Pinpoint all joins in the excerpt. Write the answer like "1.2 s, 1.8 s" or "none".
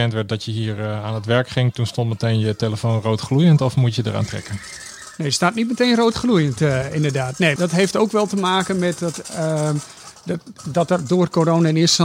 7.6 s